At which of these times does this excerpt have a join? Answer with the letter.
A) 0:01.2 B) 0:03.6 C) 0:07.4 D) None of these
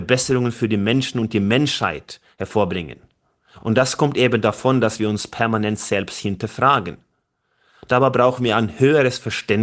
D